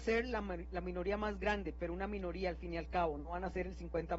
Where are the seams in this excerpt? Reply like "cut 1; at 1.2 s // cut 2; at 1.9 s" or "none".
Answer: none